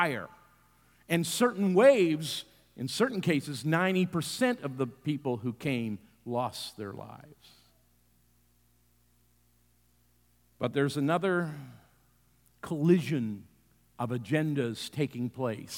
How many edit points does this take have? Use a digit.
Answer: 0